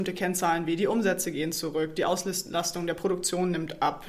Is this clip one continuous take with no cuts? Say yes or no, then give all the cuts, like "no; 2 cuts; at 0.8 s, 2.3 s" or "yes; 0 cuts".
yes; 0 cuts